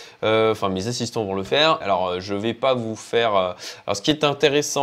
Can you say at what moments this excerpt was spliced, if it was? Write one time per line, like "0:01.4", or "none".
0:01.8